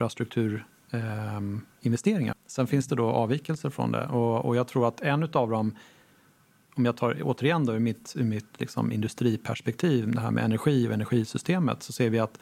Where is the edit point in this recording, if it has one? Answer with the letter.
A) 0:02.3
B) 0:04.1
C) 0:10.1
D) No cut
A